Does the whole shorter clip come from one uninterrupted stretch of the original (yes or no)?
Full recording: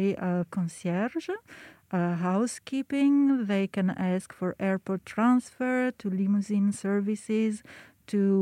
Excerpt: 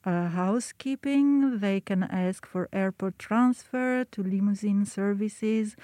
yes